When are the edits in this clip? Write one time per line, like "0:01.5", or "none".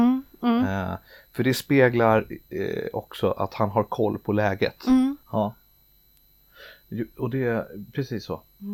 0:05.2